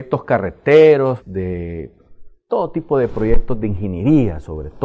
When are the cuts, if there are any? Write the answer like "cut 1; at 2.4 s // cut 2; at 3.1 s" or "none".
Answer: cut 1; at 1.2 s // cut 2; at 2.3 s